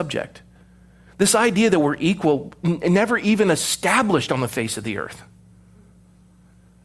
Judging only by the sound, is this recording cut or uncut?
uncut